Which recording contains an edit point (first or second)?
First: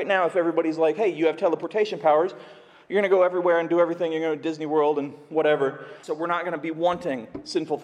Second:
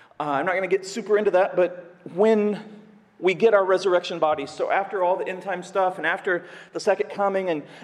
first